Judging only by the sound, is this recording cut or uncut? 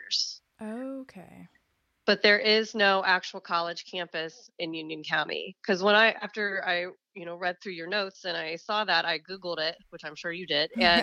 uncut